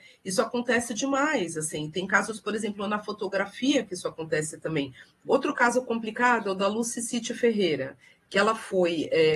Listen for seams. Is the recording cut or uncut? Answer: cut